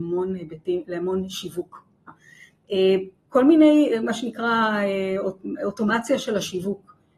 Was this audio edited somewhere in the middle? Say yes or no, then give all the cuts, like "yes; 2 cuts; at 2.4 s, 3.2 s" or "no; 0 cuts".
yes; 1 cut; at 2.1 s